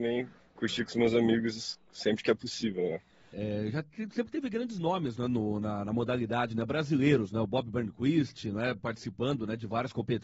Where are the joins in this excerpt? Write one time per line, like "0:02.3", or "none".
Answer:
0:03.3

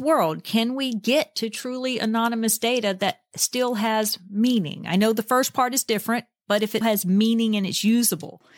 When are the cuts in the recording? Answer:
0:06.8

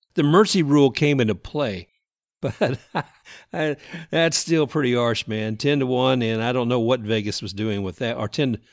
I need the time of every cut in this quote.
none

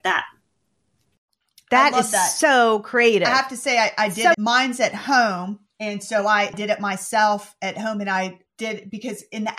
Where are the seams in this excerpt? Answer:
0:04.3

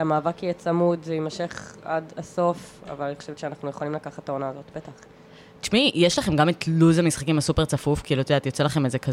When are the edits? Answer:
none

